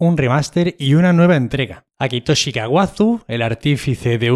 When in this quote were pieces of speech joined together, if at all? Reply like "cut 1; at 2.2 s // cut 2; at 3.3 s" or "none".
cut 1; at 1.9 s